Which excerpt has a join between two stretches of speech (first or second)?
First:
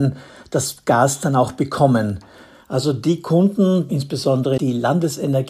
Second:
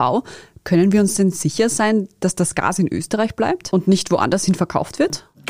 first